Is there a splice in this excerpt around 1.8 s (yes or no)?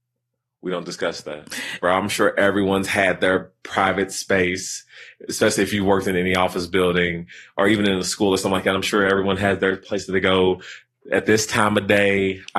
yes